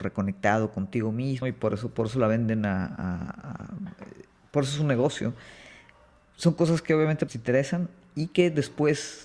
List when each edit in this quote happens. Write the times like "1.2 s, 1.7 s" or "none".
1.4 s, 7.3 s